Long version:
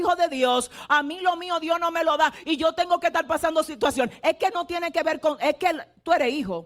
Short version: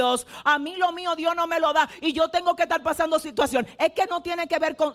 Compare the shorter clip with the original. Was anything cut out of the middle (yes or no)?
no